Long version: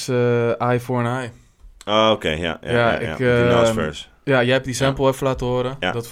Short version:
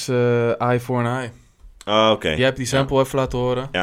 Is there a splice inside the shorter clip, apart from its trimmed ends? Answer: yes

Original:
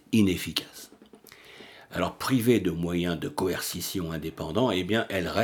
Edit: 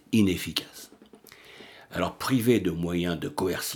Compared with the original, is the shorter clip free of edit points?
yes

